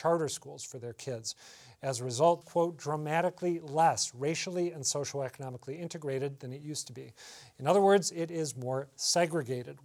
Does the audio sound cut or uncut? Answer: cut